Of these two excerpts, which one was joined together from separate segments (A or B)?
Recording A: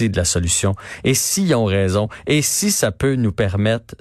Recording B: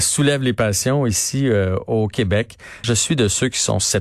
B